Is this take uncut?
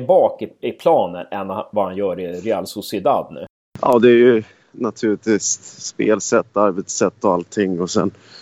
yes; 0 cuts

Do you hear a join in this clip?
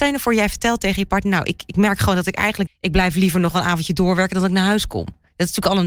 yes; 1 cut; at 2.7 s

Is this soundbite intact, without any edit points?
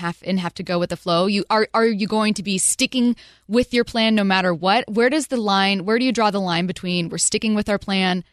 yes; 0 cuts

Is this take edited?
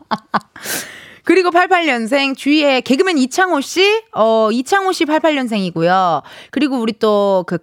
no; 0 cuts

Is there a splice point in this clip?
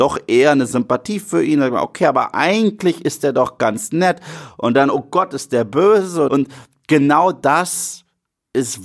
yes; 1 cut; at 6.3 s

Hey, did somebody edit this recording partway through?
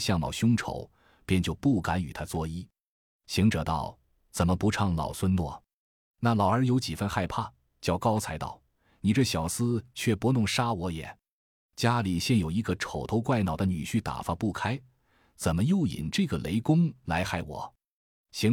no; 0 cuts

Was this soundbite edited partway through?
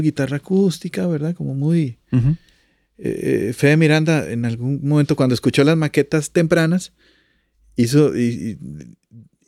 no; 0 cuts

